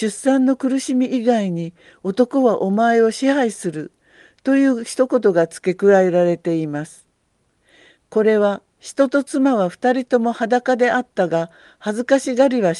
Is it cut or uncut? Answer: cut